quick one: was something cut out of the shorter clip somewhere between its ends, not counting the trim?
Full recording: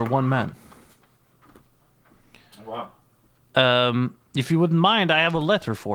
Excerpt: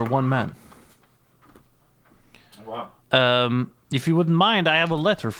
yes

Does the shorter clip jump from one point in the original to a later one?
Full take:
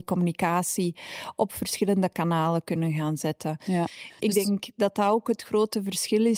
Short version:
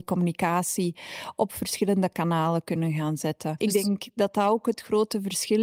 yes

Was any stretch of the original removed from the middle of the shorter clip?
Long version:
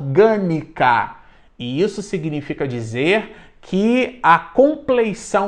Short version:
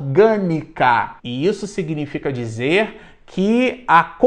yes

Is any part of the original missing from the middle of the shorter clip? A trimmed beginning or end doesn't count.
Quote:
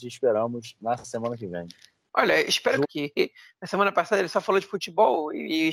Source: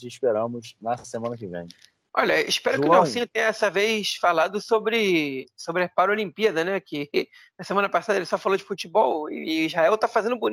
yes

